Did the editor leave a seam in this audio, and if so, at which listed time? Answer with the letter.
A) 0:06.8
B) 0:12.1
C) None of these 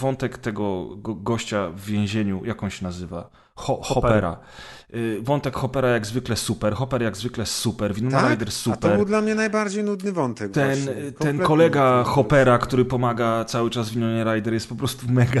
C